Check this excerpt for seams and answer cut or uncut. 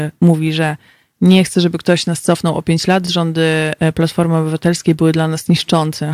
uncut